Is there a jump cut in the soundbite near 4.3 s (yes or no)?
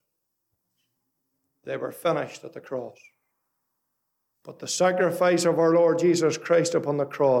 yes